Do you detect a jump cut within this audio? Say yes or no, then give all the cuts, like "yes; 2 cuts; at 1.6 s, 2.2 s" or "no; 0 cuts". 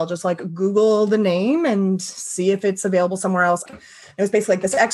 yes; 1 cut; at 3.7 s